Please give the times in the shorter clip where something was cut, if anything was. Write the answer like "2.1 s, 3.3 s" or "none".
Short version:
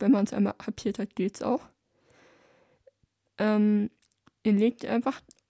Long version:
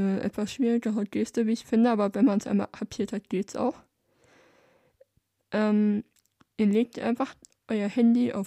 none